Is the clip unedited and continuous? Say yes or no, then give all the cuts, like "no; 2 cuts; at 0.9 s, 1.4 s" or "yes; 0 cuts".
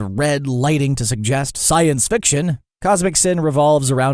yes; 0 cuts